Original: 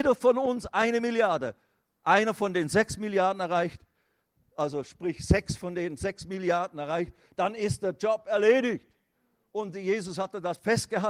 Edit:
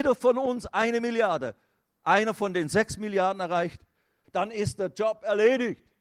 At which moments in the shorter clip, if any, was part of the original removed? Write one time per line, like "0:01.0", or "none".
0:04.2